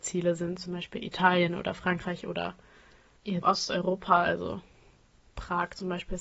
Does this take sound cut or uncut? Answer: cut